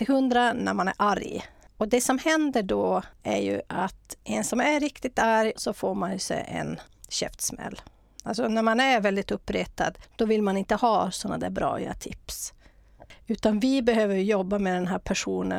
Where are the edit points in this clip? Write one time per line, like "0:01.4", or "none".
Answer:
0:05.5